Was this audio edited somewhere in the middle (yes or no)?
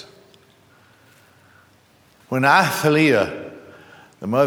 yes